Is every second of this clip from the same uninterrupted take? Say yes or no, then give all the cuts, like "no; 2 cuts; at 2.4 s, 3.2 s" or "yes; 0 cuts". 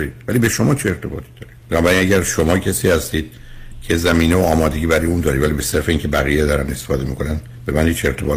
no; 1 cut; at 1.6 s